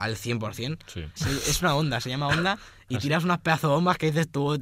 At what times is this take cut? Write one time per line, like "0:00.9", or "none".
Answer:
0:01.2